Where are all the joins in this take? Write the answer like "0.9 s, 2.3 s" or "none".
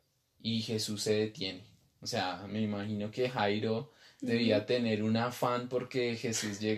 none